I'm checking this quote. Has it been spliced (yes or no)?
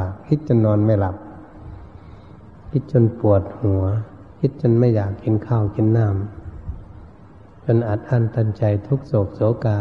yes